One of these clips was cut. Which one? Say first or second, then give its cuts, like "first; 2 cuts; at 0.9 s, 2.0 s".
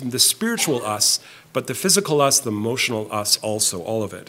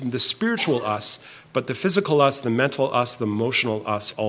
first; 1 cut; at 2.4 s